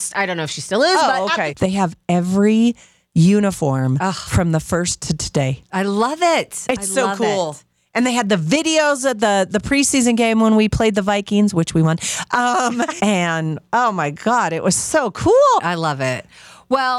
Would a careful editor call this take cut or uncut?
cut